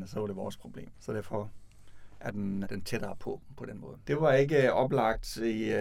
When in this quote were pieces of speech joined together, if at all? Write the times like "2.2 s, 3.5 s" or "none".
0.9 s, 2.6 s, 4.0 s